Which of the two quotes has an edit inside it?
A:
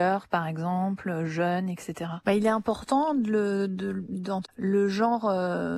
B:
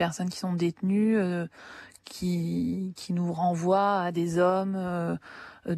A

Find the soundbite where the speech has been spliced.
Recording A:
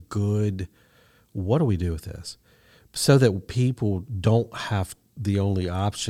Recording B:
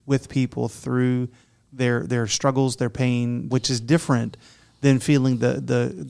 B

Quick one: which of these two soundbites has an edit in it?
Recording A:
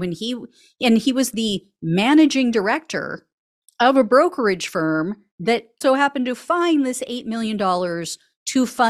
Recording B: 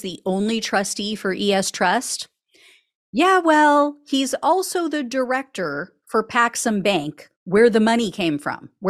A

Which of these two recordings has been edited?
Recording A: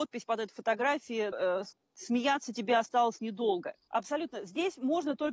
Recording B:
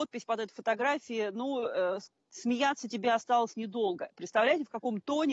A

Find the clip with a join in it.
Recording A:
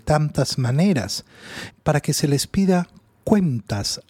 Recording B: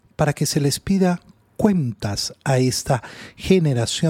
A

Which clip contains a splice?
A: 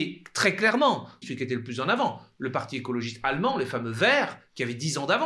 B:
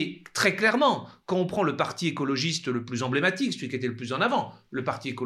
A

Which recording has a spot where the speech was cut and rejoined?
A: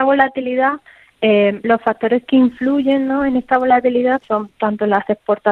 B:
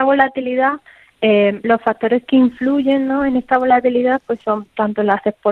A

